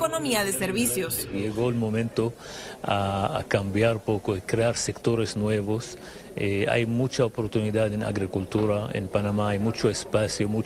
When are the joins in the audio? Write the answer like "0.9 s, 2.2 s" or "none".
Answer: none

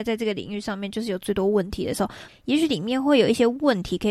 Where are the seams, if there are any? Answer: 2.3 s

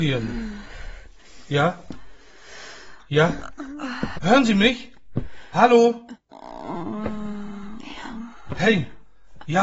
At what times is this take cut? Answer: 4.1 s

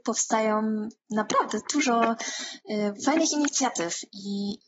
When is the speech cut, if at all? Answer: 2.9 s

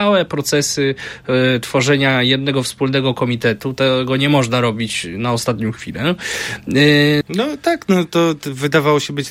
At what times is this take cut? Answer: 7.2 s

